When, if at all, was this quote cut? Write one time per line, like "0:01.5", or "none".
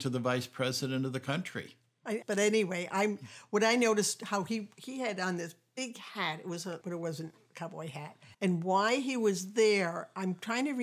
0:02.2
0:06.8
0:08.3